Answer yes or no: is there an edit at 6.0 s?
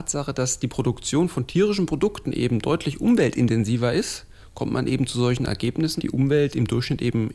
yes